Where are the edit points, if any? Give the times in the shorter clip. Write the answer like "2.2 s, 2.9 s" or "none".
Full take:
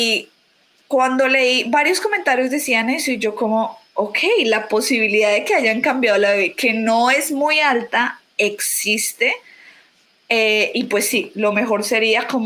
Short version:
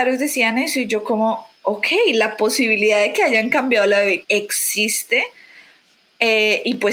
4.2 s